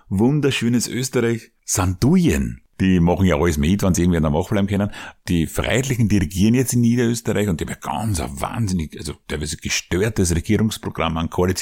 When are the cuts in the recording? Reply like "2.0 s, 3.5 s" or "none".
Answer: 2.7 s